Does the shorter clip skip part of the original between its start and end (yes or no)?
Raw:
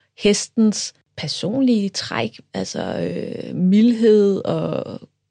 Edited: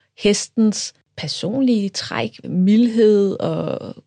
yes